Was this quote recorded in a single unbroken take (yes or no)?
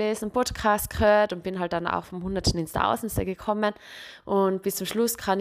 yes